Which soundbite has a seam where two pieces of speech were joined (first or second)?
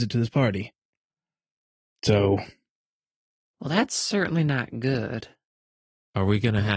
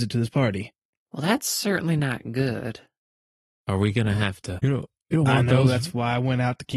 second